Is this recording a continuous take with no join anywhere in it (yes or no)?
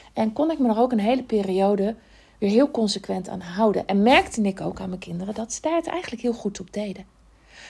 yes